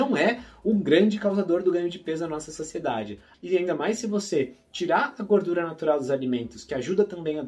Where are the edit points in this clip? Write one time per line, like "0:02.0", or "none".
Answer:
0:03.3

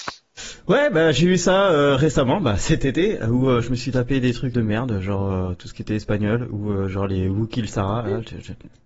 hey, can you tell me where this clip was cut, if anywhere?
0:04.5

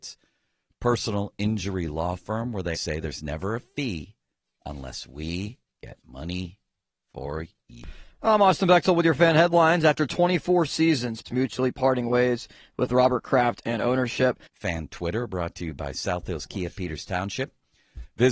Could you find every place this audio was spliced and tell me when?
0:02.7
0:11.2
0:14.5

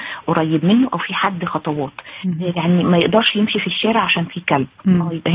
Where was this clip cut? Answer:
0:02.5

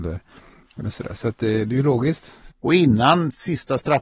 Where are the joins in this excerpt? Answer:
0:02.5

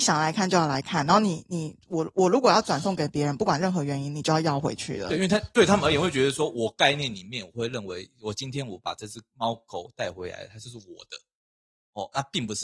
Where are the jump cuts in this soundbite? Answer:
none

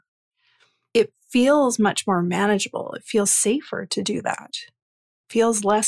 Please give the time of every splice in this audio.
none

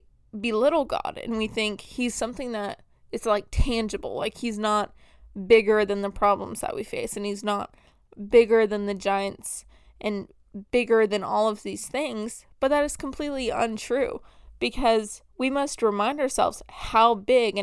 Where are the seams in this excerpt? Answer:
none

